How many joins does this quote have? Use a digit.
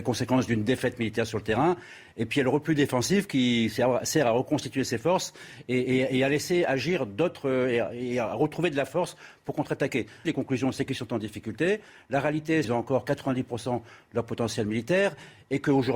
2